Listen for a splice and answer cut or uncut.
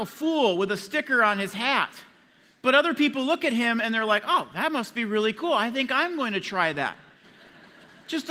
cut